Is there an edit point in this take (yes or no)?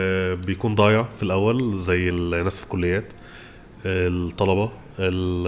yes